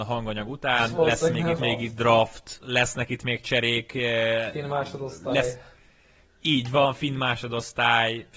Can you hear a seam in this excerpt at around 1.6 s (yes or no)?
yes